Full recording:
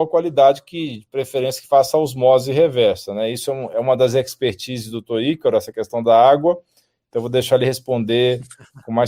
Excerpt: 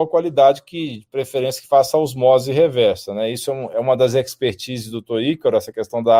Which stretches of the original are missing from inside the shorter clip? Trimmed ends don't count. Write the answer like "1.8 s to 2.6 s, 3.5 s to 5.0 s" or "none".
none